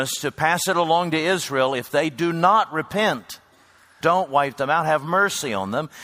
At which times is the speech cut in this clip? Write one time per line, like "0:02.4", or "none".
0:04.0